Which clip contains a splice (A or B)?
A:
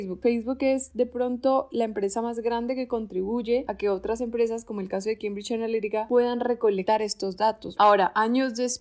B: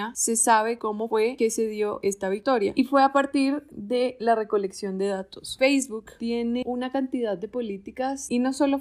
A